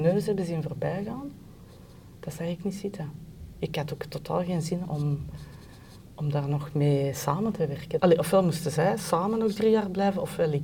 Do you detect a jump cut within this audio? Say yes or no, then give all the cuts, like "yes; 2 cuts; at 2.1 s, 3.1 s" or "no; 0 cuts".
yes; 2 cuts; at 4.8 s, 8.0 s